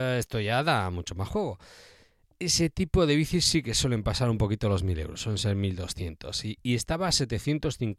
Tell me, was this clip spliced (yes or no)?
no